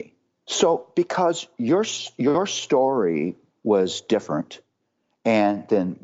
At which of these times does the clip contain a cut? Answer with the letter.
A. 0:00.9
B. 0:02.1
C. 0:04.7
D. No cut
D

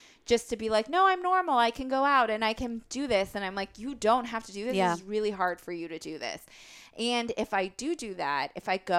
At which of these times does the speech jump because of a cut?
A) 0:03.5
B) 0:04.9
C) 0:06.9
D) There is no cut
D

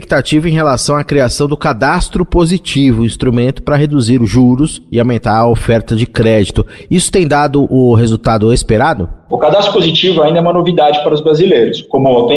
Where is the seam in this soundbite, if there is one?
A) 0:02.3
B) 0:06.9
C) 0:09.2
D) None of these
D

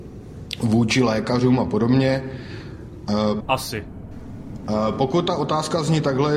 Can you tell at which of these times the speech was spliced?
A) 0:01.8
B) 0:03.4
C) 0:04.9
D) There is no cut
B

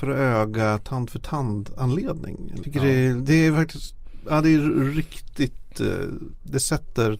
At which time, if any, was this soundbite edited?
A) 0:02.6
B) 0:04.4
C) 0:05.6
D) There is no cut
A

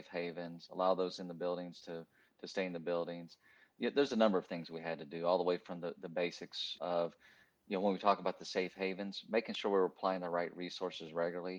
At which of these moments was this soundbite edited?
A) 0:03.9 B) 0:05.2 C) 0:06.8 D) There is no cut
C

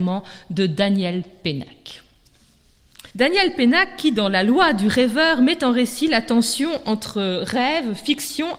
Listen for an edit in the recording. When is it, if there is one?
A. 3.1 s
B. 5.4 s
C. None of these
A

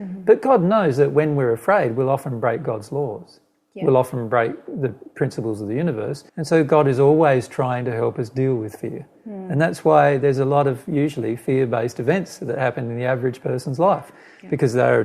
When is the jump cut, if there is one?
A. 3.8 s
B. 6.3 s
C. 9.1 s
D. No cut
B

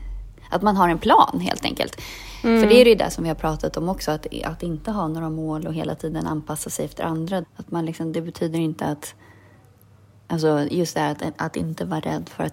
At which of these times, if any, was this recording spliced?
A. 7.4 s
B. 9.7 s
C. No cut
A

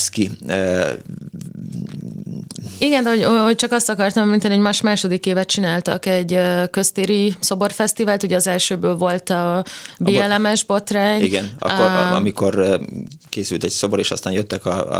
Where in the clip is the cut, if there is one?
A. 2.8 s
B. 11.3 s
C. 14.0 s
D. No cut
D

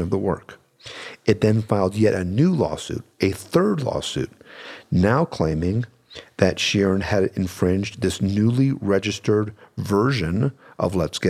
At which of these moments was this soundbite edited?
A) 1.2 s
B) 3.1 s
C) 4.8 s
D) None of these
D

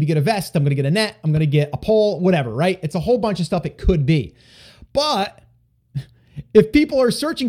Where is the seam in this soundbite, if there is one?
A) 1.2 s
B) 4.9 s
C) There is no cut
B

